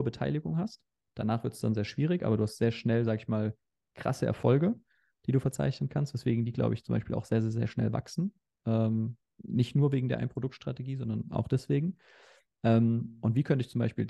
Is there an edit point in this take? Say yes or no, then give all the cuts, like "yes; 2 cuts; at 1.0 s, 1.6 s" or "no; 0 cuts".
no; 0 cuts